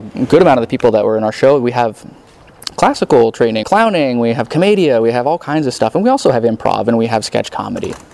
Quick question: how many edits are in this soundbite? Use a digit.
1